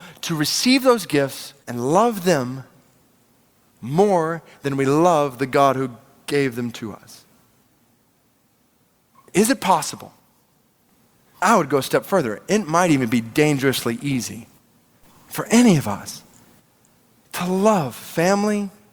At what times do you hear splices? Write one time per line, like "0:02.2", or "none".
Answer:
0:01.6